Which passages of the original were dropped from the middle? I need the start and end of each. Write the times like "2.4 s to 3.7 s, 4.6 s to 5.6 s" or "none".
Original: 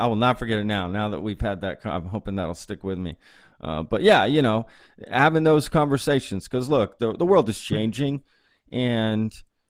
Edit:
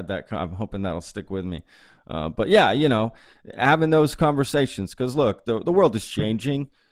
none